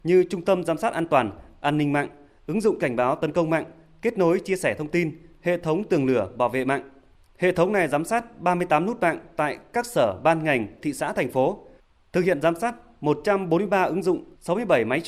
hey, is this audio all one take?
no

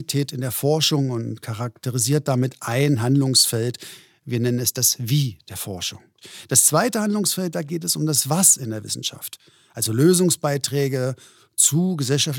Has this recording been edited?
no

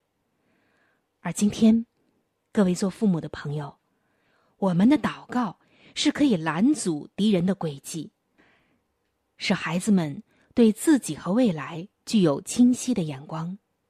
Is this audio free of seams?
yes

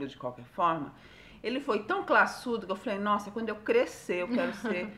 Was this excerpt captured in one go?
yes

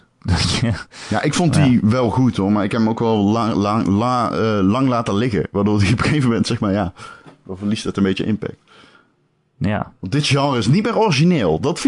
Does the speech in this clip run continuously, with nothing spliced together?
yes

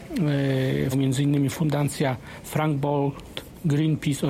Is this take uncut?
no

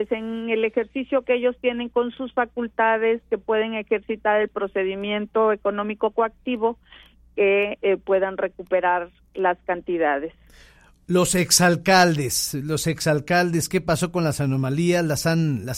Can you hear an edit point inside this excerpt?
no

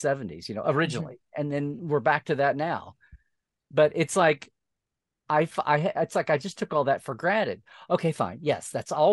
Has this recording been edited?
no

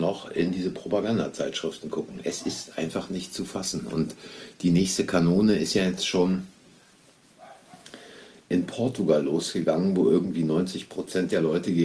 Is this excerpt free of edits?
yes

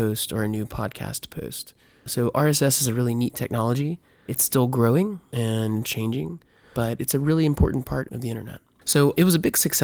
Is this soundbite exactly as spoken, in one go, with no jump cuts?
no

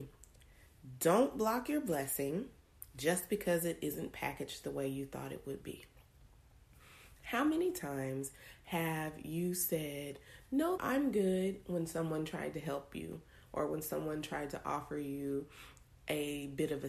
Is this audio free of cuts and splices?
no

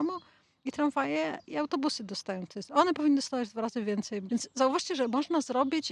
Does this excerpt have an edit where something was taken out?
yes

